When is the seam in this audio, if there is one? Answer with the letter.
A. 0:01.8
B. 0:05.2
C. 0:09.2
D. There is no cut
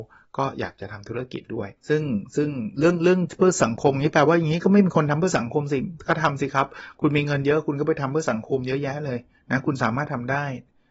A